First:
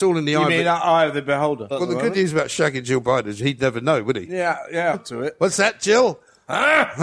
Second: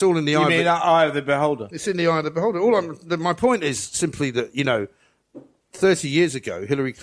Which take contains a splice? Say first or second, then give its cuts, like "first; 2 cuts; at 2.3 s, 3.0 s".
first; 2 cuts; at 1.7 s, 4.9 s